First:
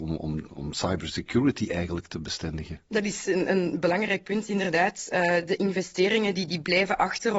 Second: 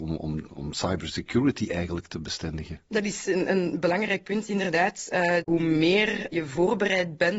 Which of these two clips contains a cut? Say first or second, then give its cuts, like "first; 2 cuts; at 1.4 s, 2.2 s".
second; 1 cut; at 5.4 s